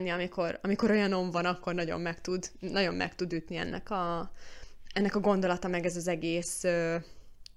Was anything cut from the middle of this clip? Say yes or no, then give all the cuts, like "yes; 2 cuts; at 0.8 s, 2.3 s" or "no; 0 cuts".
no; 0 cuts